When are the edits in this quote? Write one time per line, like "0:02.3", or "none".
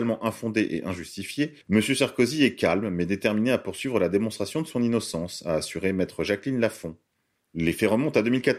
0:01.6
0:07.5